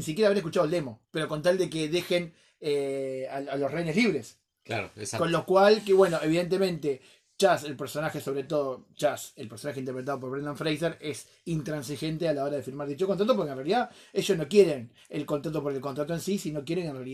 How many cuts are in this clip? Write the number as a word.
one